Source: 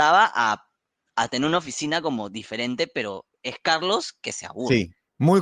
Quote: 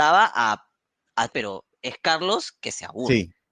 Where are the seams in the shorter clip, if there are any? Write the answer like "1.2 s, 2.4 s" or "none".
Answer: 1.3 s